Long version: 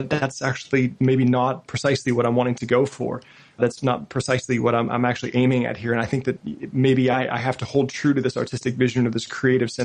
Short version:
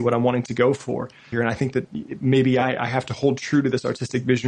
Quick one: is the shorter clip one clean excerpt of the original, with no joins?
no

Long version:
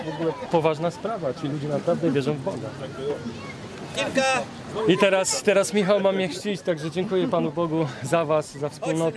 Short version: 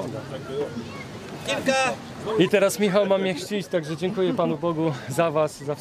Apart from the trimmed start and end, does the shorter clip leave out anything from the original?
yes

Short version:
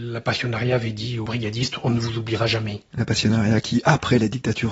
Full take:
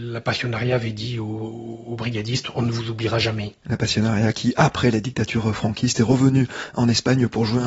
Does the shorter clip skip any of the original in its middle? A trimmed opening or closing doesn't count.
yes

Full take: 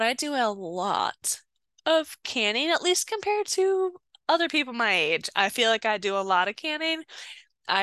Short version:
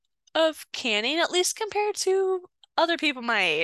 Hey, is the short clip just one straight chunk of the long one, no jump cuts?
yes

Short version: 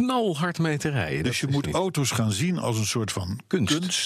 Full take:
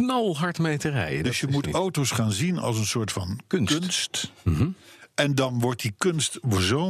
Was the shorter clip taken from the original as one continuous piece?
yes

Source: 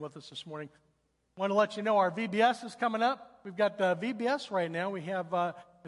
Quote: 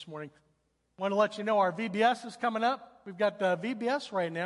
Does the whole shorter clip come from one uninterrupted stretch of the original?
yes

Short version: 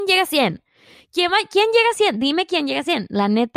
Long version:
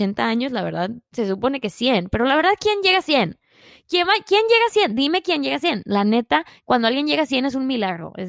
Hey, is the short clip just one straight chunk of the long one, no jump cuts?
yes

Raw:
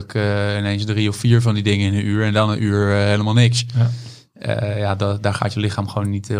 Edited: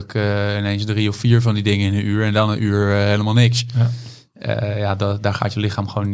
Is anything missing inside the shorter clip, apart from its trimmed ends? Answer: no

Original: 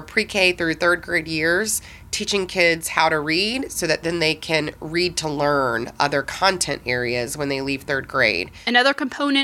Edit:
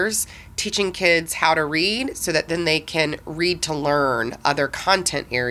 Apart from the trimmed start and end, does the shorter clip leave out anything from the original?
no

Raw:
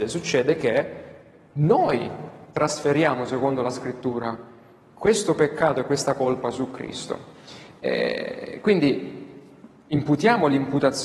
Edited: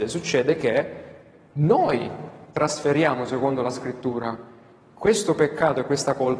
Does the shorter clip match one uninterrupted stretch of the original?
yes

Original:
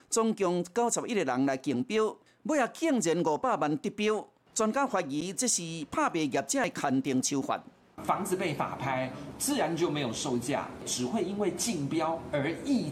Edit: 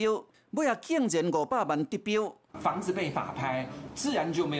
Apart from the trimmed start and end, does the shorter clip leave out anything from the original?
yes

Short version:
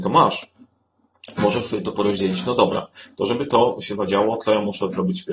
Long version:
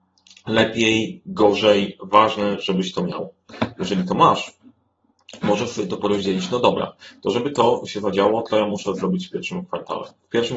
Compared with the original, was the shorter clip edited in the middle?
no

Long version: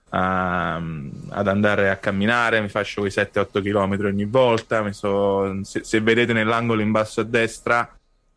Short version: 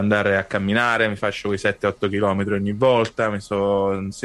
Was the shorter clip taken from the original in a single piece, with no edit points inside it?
yes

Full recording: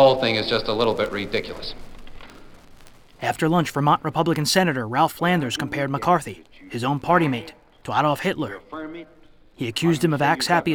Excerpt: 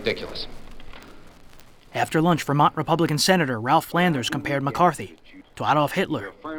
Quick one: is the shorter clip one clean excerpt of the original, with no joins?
no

